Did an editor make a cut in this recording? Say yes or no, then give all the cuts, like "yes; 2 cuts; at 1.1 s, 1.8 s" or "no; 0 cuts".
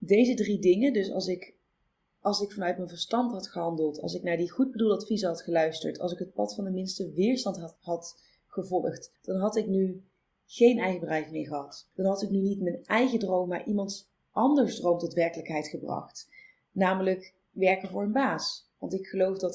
no; 0 cuts